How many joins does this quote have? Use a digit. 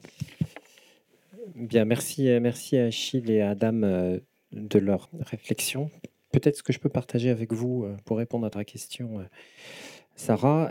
1